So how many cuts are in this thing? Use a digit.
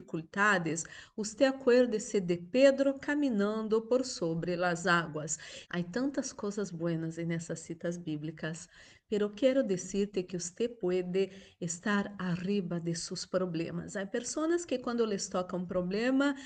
1